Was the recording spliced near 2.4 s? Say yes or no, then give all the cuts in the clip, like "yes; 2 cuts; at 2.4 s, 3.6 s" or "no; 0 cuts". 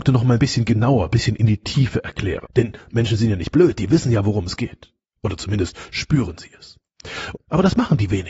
yes; 2 cuts; at 2.4 s, 7.3 s